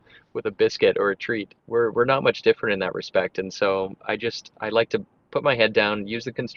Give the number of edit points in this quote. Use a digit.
1